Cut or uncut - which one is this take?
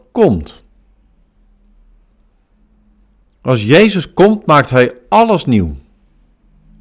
uncut